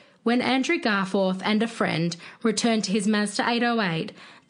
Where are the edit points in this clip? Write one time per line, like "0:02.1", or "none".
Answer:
none